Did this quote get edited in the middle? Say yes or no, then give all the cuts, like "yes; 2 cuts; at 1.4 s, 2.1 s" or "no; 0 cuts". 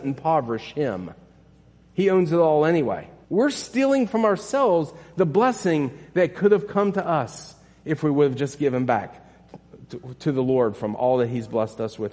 yes; 1 cut; at 3.2 s